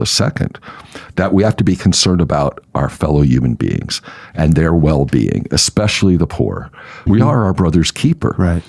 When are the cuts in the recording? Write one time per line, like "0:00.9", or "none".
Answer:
0:07.1